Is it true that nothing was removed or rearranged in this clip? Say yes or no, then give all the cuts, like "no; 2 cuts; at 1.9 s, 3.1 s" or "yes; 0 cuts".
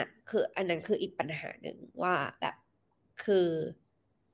yes; 0 cuts